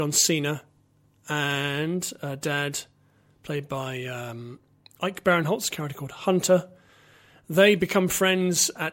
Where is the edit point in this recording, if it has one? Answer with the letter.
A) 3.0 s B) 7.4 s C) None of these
C